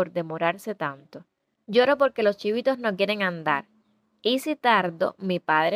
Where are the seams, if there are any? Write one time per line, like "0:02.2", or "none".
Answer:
0:01.6